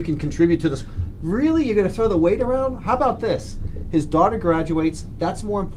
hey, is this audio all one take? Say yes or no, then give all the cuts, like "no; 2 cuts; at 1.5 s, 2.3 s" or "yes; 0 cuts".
yes; 0 cuts